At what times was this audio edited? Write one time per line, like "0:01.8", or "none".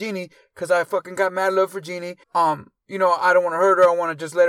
0:02.2

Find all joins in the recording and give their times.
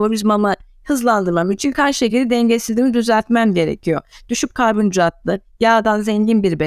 none

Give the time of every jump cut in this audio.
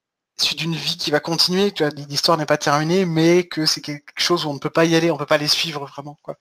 none

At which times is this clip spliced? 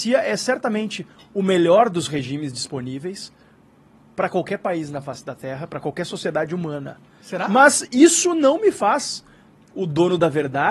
none

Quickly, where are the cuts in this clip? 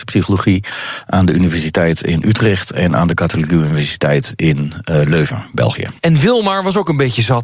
none

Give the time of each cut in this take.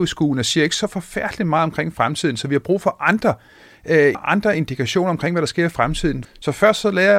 0:04.1
0:06.2

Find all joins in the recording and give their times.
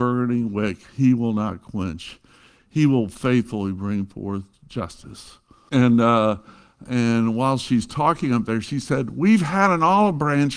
0:05.7

